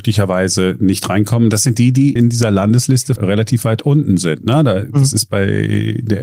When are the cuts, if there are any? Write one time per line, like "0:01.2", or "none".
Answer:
0:02.2
0:03.2